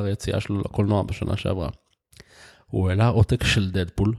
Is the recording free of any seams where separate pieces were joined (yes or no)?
no